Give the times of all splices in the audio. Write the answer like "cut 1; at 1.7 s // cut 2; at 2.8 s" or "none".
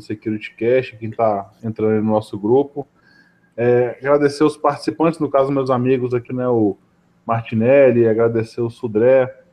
cut 1; at 6.3 s